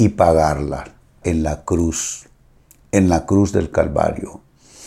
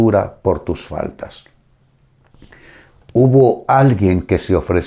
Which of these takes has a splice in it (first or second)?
first